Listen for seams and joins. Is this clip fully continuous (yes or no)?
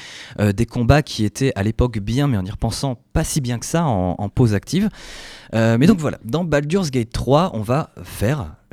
yes